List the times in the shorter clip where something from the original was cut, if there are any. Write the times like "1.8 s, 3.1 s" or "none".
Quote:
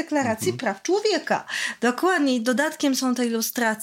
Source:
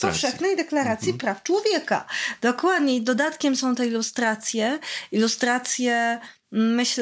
none